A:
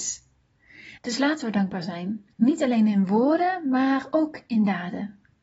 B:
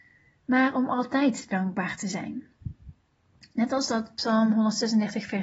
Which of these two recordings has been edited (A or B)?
A